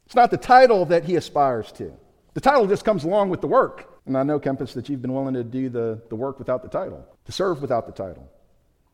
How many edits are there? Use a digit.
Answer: 2